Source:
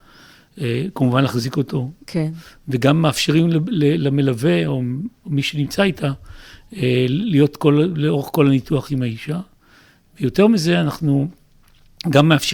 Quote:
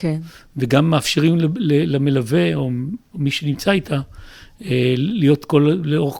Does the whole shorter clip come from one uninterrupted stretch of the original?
yes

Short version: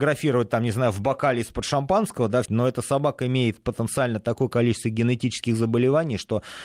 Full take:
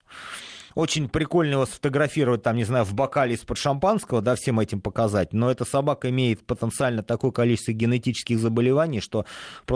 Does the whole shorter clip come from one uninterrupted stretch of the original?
no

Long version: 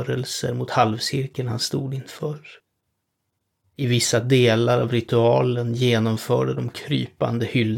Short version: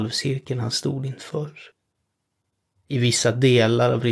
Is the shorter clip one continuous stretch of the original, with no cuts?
yes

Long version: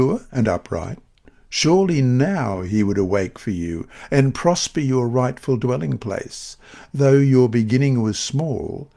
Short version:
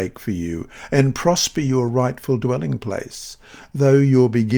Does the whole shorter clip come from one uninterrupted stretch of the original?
yes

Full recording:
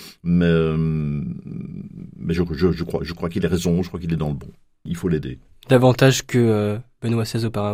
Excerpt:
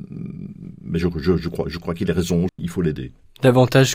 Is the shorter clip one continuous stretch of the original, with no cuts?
no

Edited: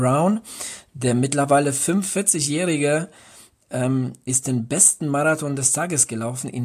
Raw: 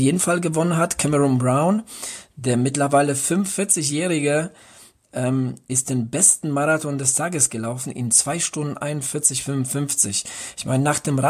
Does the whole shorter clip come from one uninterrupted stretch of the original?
yes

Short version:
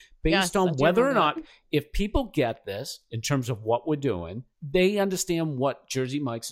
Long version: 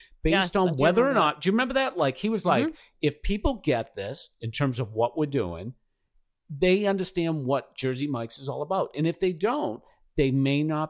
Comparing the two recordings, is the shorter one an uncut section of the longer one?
no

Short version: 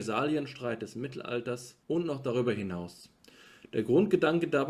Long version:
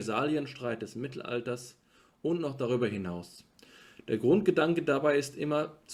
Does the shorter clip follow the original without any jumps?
no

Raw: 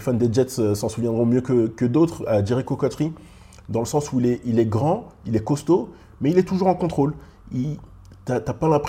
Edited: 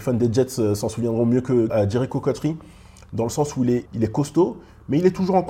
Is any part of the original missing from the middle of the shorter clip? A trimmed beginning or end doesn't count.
yes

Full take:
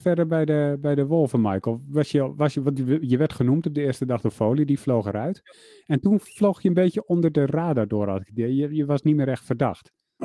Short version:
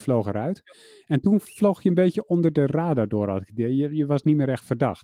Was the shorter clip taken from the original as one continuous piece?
yes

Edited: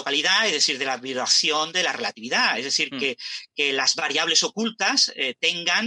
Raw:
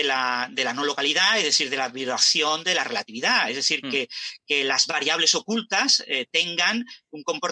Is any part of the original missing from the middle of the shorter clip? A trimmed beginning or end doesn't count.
no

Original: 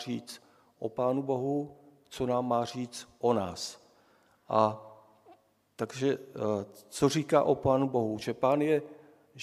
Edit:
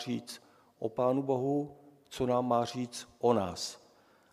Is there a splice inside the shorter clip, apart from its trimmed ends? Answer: no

